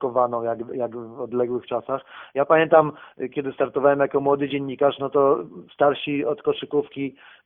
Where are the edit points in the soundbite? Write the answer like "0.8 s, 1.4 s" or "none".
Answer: none